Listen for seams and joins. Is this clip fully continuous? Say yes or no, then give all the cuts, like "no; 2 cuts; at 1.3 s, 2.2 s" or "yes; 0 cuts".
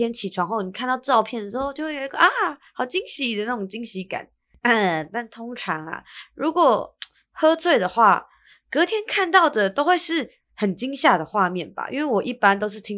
yes; 0 cuts